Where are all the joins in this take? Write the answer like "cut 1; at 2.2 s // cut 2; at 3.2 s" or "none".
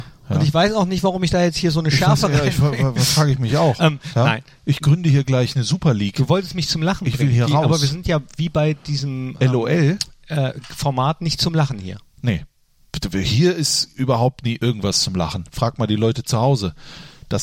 none